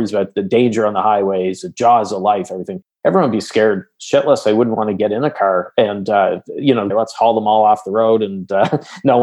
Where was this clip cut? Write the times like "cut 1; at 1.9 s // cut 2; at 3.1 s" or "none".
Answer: cut 1; at 6.9 s

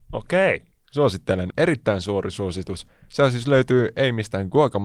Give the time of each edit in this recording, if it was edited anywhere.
cut 1; at 1.5 s

